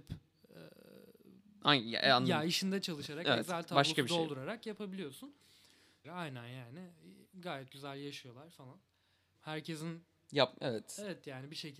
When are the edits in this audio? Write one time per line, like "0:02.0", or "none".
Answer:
0:06.0
0:09.3